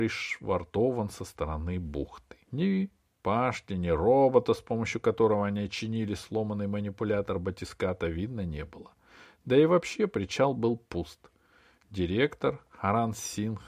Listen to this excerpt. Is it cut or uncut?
cut